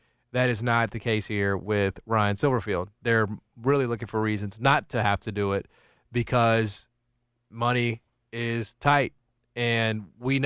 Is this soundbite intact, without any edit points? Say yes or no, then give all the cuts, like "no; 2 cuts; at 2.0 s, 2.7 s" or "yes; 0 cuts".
yes; 0 cuts